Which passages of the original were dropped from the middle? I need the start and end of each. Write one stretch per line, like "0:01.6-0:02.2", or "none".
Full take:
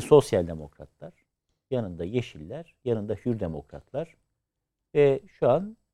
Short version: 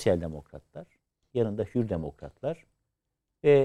0:01.6-0:02.8